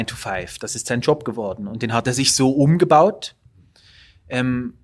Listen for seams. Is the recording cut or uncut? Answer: uncut